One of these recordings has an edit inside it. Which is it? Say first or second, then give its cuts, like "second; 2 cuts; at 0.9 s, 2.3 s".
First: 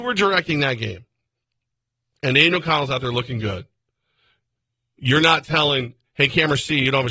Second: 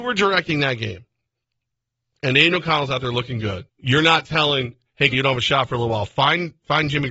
second; 2 cuts; at 3.7 s, 5.1 s